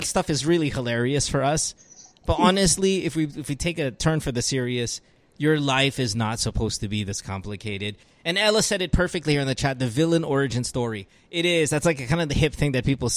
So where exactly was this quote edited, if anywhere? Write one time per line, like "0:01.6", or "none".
0:08.0